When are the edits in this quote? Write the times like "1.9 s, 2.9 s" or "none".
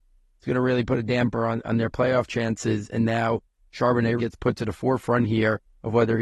4.2 s

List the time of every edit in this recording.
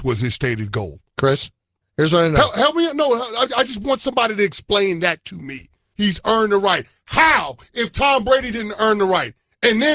1.8 s, 5.9 s

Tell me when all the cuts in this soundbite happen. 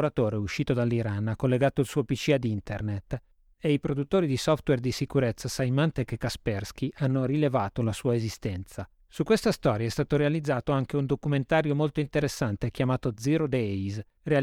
none

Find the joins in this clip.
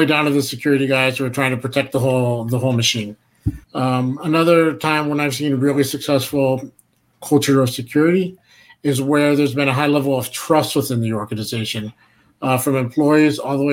3.6 s

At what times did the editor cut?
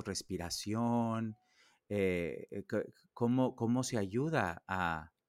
none

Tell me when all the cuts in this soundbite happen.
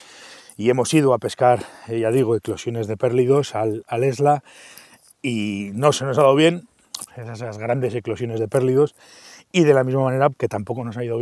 7.1 s, 10.3 s

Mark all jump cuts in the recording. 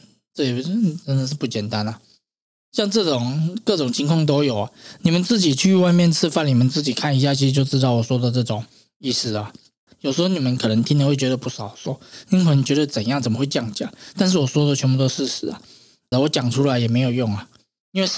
9.9 s, 16.1 s

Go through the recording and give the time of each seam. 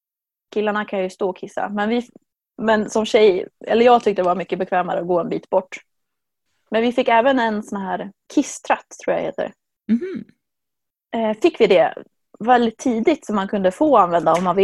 none

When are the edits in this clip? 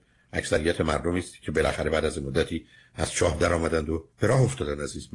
4.1 s

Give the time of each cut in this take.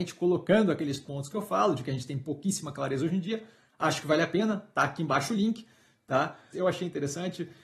6.5 s

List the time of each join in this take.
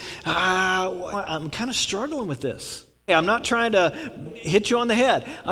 1.1 s, 3.1 s, 4.2 s

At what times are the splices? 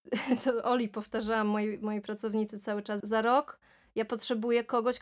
3.0 s

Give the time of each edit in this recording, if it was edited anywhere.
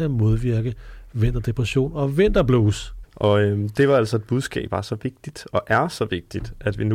3.0 s, 4.7 s

